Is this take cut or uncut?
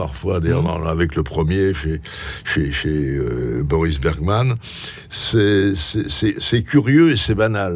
uncut